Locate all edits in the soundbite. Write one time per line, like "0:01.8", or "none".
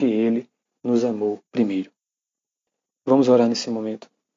0:01.5